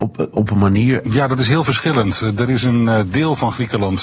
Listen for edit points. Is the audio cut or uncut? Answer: cut